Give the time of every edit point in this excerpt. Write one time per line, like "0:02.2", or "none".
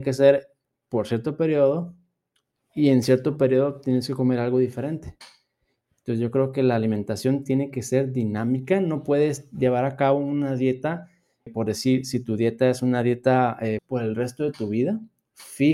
0:11.5
0:13.8